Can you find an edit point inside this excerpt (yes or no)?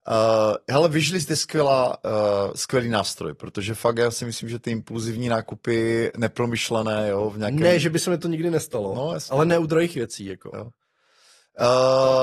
no